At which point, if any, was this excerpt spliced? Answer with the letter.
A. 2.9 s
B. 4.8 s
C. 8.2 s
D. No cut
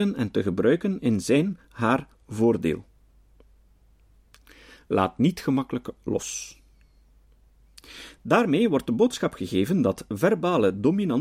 D